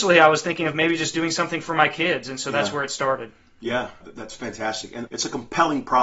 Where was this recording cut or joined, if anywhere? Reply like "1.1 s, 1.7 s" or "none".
4.0 s